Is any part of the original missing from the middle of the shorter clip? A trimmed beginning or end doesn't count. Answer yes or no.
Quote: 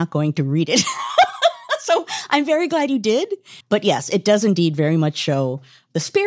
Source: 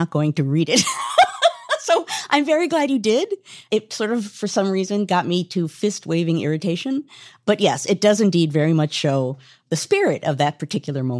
yes